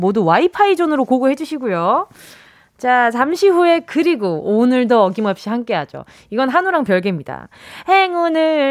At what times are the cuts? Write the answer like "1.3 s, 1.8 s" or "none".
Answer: none